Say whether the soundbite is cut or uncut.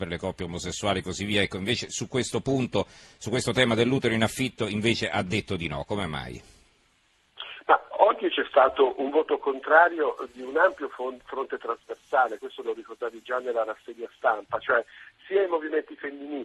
uncut